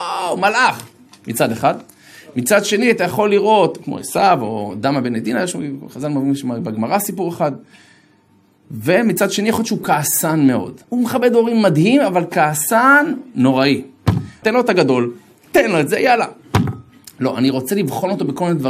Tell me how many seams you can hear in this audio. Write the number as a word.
two